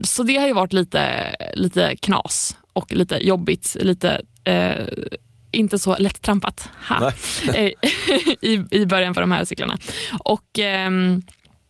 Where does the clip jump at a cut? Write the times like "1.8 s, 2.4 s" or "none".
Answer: none